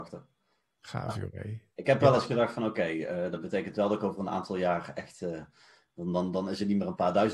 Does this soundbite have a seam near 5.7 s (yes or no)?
no